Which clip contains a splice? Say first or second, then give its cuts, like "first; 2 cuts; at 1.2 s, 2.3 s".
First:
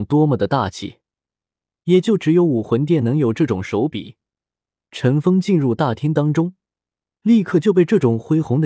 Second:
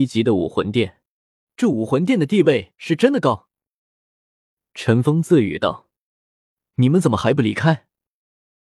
second; 1 cut; at 1.5 s